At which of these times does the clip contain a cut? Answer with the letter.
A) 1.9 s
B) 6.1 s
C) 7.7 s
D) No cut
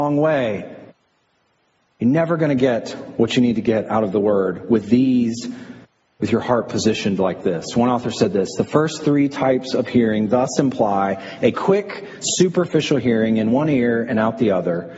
D